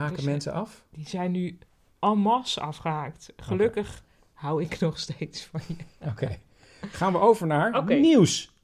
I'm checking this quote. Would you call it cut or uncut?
uncut